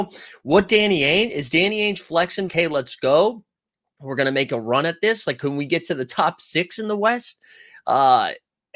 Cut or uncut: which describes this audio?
cut